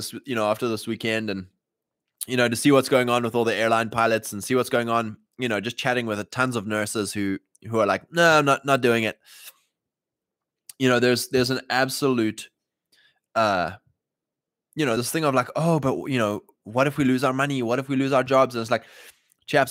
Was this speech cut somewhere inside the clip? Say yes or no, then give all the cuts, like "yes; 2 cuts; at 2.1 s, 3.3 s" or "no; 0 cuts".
no; 0 cuts